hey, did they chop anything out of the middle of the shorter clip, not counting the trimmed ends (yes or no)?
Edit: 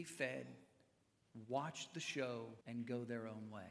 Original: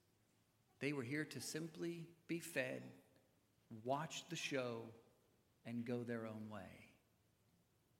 yes